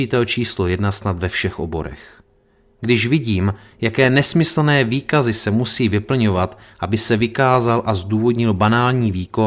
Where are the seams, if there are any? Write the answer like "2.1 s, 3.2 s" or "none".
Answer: none